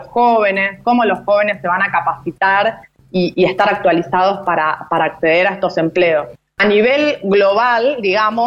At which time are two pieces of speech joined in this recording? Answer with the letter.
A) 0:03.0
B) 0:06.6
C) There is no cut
B